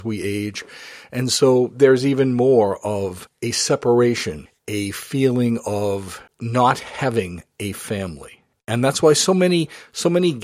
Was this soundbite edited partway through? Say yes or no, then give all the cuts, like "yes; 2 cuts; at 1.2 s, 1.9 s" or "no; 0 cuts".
no; 0 cuts